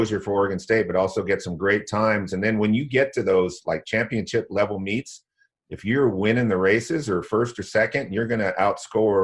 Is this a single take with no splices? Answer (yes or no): yes